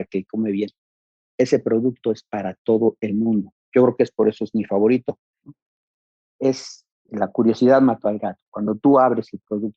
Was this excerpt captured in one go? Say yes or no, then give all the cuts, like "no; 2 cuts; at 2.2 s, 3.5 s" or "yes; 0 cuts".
no; 2 cuts; at 5.4 s, 7.1 s